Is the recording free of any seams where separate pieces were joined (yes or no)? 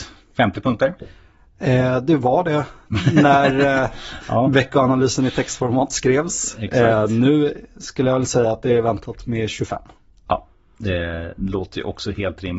yes